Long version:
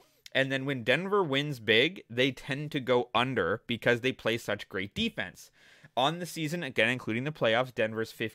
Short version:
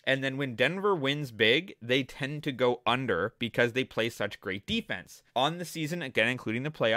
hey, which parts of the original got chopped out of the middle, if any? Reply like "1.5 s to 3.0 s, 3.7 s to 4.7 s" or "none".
5.6 s to 5.9 s